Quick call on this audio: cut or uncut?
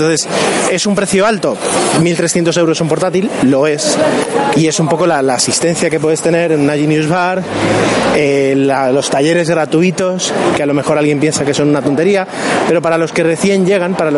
cut